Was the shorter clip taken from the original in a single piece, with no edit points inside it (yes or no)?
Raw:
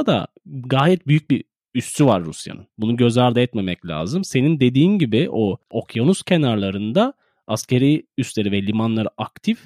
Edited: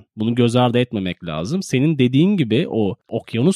yes